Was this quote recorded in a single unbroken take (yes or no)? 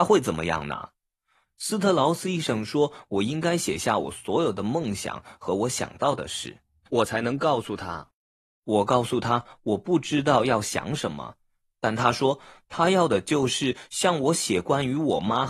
no